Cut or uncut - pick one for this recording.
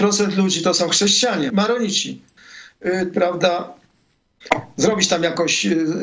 cut